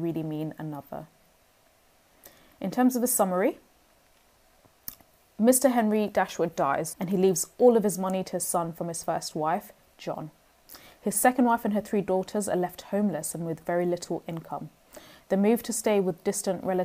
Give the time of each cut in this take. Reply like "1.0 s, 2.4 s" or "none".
6.9 s